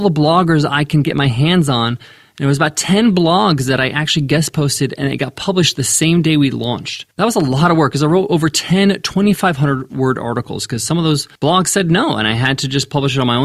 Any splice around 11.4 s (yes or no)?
yes